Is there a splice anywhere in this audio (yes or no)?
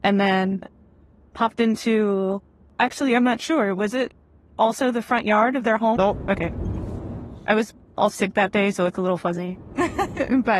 yes